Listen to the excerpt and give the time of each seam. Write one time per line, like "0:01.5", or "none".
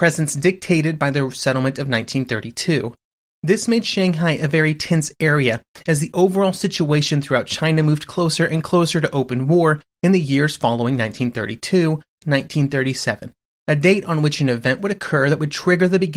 0:12.2